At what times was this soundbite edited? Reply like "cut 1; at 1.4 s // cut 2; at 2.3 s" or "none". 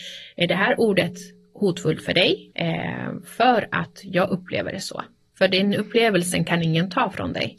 cut 1; at 2.5 s